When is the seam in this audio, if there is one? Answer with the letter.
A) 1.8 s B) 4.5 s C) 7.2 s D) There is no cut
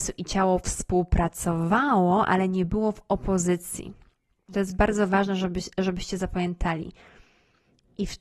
B